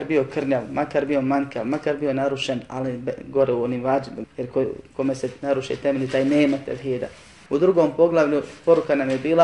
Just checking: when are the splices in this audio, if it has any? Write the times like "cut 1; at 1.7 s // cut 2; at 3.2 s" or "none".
cut 1; at 4.2 s // cut 2; at 7.5 s